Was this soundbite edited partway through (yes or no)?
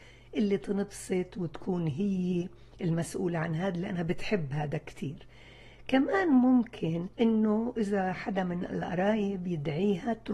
yes